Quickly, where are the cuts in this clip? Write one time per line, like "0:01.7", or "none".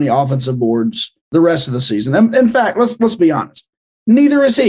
none